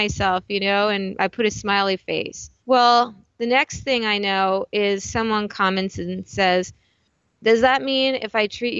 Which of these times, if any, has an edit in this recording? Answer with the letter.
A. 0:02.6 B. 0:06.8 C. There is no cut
A